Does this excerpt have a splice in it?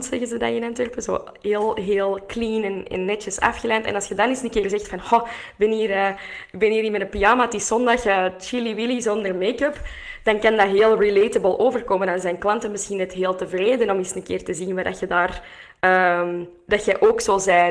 no; 0 cuts

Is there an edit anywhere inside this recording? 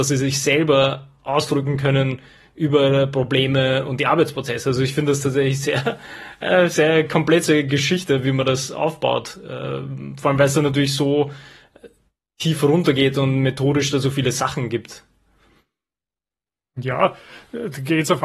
no; 0 cuts

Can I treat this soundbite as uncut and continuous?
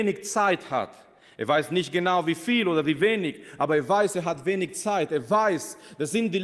yes; 0 cuts

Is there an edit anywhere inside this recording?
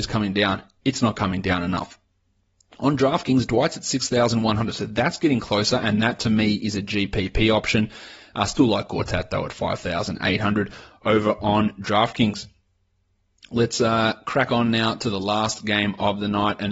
no; 0 cuts

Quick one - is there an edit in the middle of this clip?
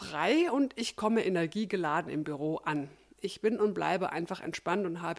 yes; 1 cut; at 3.2 s

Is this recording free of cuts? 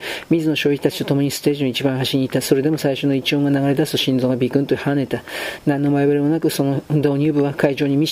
yes; 0 cuts

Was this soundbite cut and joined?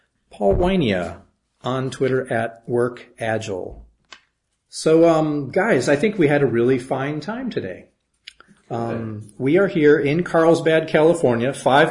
no; 0 cuts

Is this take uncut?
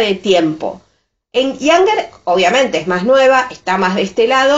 yes; 0 cuts

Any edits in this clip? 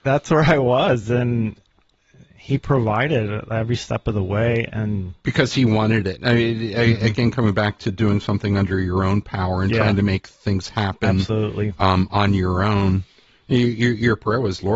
no; 0 cuts

